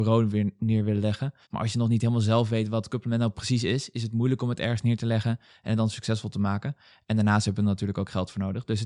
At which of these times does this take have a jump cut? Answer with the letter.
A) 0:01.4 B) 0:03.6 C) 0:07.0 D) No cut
A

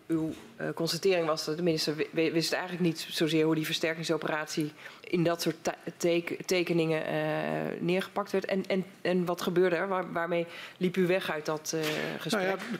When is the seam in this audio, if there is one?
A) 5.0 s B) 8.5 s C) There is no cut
A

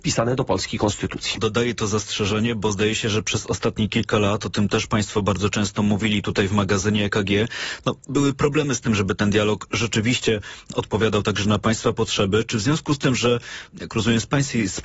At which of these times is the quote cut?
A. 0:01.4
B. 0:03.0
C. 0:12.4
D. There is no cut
A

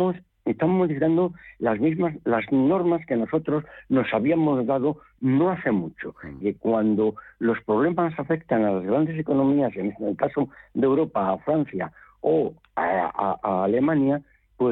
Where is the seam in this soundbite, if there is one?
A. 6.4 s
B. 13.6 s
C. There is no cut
A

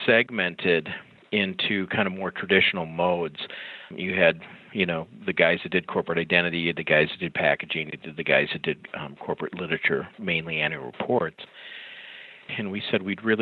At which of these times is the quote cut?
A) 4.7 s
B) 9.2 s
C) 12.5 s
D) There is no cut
C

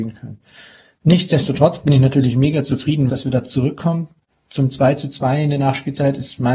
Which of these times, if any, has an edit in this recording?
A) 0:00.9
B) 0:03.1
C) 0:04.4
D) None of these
B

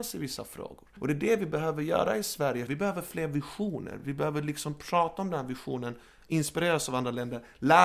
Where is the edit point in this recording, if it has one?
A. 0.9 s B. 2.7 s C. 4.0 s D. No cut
D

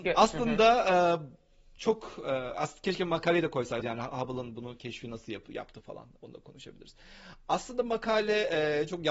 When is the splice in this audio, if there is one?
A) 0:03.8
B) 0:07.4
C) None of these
A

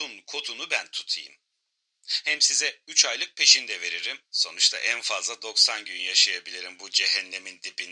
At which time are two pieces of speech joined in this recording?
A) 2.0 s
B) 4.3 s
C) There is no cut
B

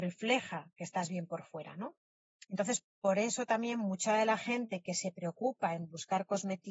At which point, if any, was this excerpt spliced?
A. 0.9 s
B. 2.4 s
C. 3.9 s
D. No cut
B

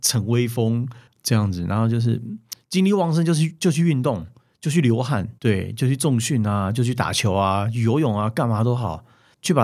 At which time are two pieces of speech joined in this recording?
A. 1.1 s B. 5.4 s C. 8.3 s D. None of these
B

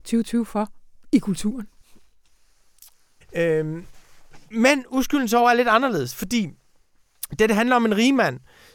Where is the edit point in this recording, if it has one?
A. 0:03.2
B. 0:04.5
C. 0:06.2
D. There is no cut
A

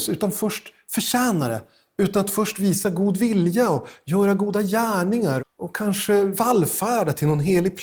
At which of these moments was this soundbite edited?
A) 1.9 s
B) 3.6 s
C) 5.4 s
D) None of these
C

